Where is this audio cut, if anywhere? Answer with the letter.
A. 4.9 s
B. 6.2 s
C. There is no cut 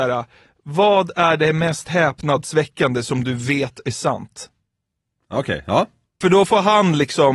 B